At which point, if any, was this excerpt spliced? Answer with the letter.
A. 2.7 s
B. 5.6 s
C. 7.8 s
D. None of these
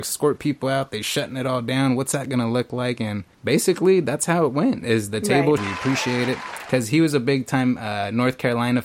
B